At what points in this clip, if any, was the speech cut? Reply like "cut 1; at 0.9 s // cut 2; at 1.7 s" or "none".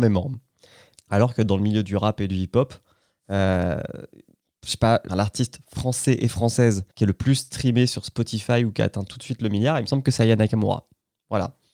cut 1; at 1.0 s // cut 2; at 5.1 s // cut 3; at 6.9 s